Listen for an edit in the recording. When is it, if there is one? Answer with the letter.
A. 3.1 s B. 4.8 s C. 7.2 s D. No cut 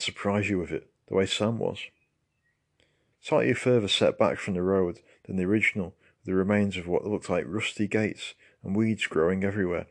A